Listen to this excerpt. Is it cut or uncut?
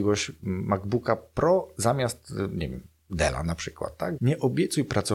cut